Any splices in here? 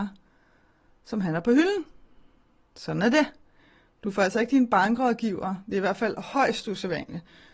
no; 0 cuts

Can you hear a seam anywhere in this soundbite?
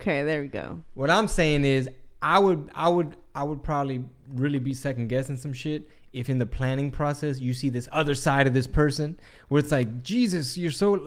no; 0 cuts

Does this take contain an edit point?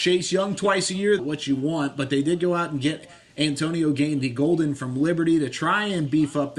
yes; 1 cut; at 1.2 s

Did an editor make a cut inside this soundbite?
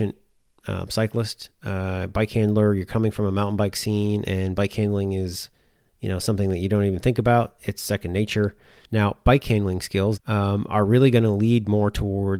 yes; 2 cuts; at 8.8 s, 10.2 s

